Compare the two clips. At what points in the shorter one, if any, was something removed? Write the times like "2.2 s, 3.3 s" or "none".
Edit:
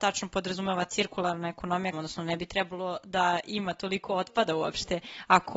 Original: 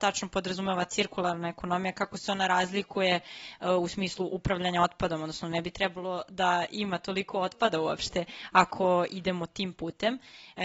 1.9 s